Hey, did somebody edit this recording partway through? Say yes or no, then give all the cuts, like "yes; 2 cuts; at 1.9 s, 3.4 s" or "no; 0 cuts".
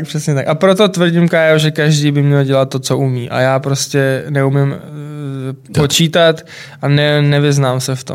yes; 1 cut; at 5.7 s